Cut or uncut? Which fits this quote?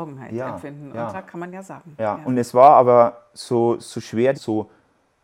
cut